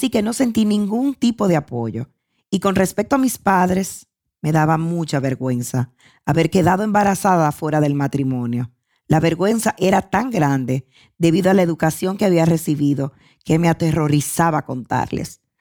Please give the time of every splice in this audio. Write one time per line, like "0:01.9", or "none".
none